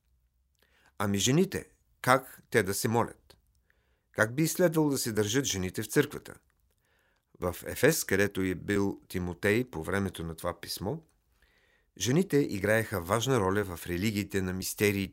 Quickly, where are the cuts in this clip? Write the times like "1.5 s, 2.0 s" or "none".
none